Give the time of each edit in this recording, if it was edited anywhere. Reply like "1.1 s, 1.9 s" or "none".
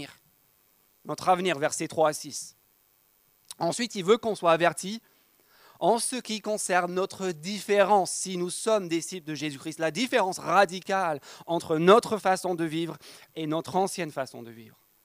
none